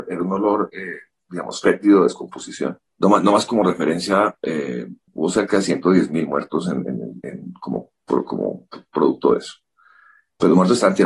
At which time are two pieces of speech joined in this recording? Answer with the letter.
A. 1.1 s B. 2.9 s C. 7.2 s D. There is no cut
B